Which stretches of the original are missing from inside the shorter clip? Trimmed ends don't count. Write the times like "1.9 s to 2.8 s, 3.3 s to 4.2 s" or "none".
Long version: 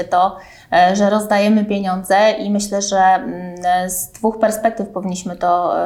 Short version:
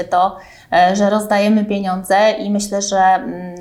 none